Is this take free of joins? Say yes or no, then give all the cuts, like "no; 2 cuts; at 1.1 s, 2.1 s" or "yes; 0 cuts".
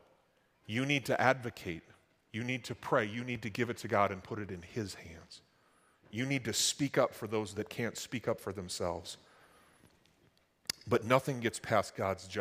yes; 0 cuts